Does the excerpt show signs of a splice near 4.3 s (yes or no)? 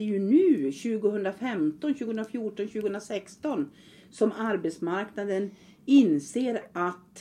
no